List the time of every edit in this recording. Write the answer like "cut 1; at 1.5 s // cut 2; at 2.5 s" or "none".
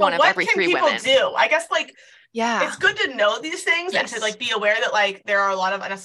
none